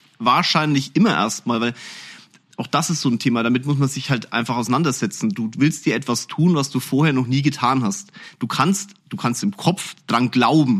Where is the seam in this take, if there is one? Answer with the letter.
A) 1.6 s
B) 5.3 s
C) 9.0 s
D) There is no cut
C